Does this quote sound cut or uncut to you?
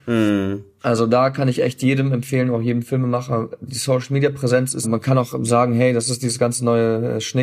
cut